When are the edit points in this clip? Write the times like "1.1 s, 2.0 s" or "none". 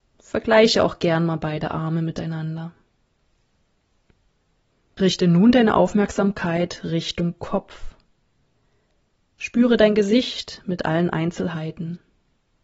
none